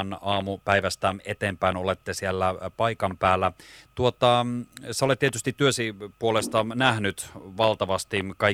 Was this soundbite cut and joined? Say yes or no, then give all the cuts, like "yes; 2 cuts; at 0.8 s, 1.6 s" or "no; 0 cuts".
no; 0 cuts